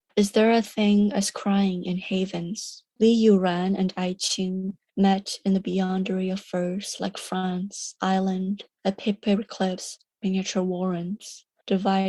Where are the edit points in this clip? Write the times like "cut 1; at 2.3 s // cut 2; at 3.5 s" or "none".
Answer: cut 1; at 2.9 s